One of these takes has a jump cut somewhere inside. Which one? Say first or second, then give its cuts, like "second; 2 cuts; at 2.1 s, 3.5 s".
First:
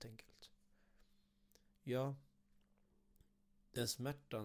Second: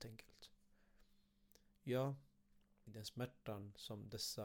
second; 1 cut; at 2.9 s